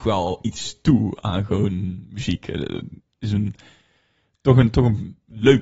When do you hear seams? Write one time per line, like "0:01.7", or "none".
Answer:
none